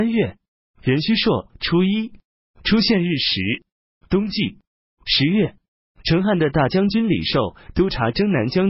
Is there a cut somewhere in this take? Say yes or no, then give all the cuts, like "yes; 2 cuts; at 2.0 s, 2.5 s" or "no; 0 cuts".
yes; 1 cut; at 4.0 s